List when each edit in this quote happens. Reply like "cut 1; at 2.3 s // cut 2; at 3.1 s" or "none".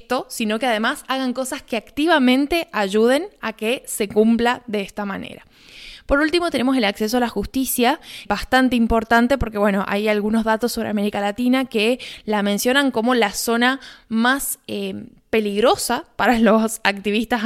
cut 1; at 8.3 s